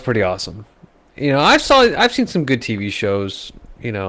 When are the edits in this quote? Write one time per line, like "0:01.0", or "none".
none